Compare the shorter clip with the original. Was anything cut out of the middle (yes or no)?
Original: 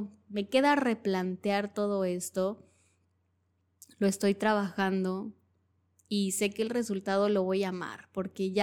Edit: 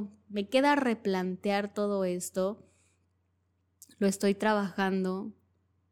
no